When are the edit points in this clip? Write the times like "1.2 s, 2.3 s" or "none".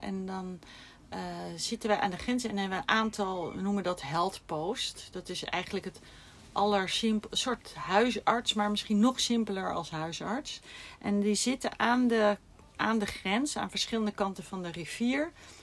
none